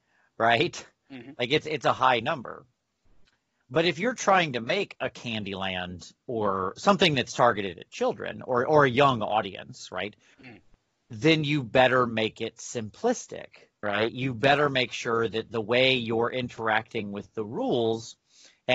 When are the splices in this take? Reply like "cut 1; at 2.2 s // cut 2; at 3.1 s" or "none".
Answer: cut 1; at 10.3 s // cut 2; at 13.8 s